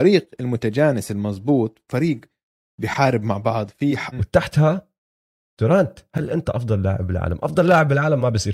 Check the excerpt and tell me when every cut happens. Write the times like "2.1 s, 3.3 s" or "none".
4.1 s